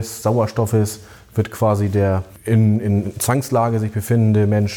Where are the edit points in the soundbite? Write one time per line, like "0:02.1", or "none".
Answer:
none